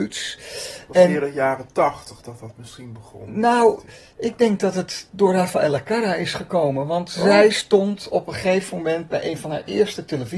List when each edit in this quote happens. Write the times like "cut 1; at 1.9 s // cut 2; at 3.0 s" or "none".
none

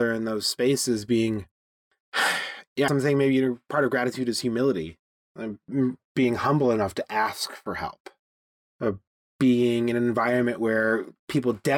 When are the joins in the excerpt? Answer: cut 1; at 2.9 s

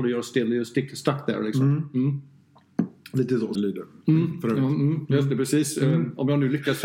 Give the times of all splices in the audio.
cut 1; at 3.6 s

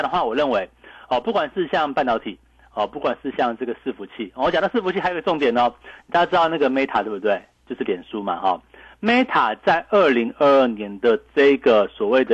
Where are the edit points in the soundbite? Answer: none

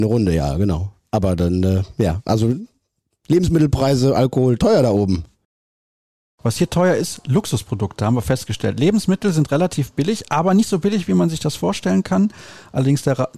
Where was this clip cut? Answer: none

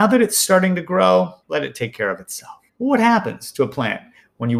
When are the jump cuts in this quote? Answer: cut 1; at 1.4 s // cut 2; at 2.7 s

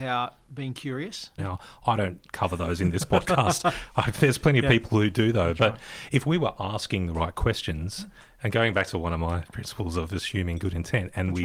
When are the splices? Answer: cut 1; at 1.4 s

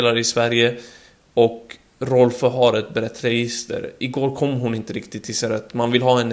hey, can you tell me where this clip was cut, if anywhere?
none

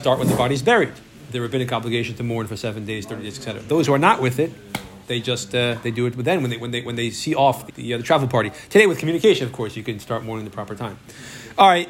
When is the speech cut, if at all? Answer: cut 1; at 7.7 s

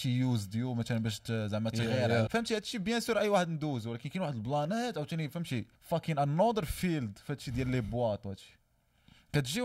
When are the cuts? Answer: cut 1; at 2.3 s // cut 2; at 5.7 s

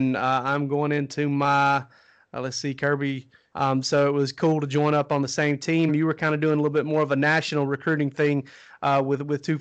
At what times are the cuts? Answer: cut 1; at 3.5 s // cut 2; at 5.9 s

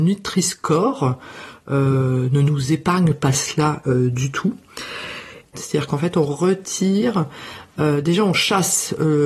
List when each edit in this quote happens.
cut 1; at 5.5 s

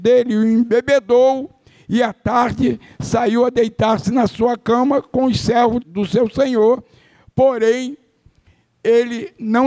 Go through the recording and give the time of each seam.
cut 1; at 5.8 s

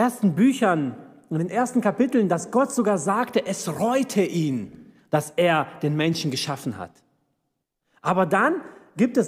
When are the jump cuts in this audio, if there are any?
none

